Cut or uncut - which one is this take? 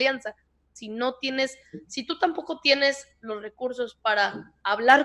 uncut